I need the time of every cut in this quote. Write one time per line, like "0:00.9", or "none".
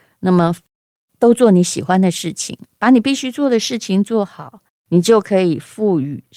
0:04.7